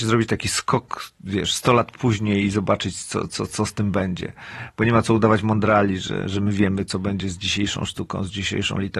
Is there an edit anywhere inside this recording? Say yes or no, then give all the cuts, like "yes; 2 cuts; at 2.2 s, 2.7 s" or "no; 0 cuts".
no; 0 cuts